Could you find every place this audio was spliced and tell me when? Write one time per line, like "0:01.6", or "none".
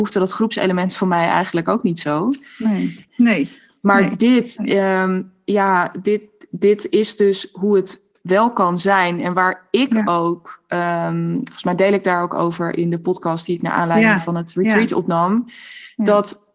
0:03.1